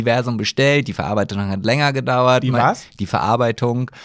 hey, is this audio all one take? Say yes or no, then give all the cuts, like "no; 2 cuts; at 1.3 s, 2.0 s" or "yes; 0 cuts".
yes; 0 cuts